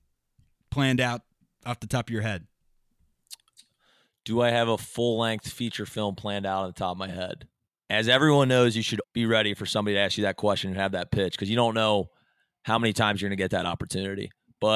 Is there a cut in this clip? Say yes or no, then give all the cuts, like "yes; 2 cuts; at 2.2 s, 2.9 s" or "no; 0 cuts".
yes; 2 cuts; at 7.7 s, 9.0 s